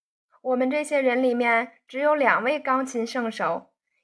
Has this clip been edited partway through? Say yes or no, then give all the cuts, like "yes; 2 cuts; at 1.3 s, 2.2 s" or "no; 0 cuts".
no; 0 cuts